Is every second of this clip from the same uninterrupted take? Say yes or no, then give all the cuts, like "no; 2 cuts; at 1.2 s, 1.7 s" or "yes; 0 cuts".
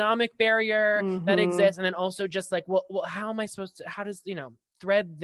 yes; 0 cuts